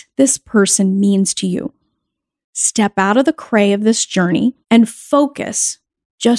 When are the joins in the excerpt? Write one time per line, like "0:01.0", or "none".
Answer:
0:02.4
0:04.6